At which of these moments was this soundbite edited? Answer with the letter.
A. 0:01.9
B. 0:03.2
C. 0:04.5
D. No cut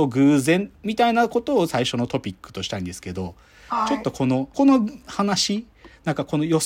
C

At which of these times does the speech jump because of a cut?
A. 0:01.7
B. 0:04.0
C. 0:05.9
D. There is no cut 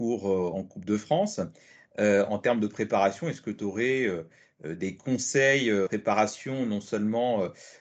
C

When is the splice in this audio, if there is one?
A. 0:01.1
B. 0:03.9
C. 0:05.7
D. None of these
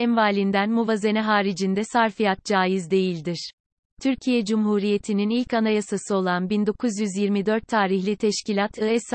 B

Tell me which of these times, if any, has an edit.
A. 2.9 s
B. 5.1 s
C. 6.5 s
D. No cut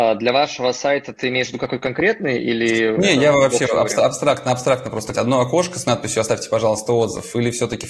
B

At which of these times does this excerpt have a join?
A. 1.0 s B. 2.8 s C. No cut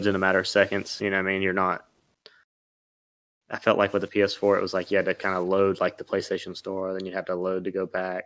C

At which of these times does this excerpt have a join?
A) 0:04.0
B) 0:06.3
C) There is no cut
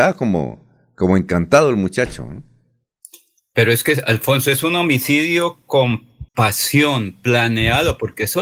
B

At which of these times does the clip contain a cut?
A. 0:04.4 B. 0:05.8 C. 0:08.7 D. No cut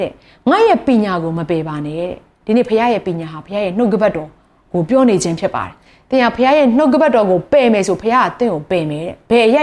D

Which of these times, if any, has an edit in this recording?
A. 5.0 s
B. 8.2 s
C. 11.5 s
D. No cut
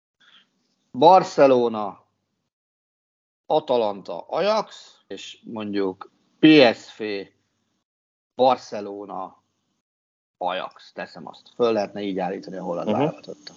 D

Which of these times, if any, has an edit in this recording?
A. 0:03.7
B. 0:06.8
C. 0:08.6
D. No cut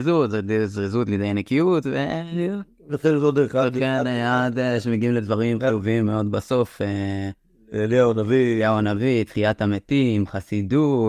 D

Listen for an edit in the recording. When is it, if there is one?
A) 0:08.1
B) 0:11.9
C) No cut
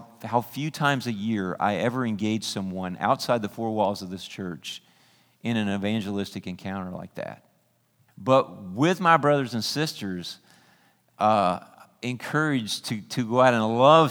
A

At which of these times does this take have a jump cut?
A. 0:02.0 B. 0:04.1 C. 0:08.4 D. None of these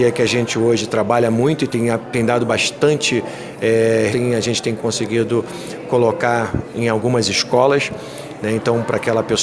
B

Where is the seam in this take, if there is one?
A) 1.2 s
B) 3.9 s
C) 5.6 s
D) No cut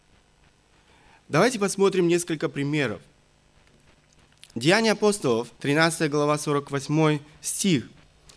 C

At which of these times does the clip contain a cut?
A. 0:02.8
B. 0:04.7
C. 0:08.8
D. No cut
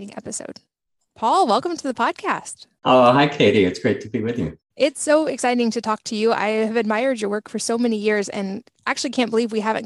A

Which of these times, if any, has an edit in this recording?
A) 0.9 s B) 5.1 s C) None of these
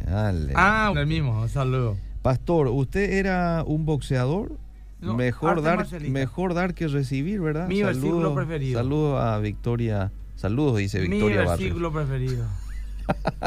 A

